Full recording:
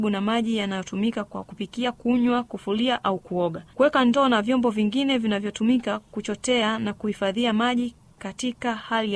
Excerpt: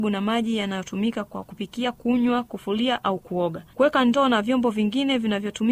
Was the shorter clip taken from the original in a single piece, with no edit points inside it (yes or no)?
yes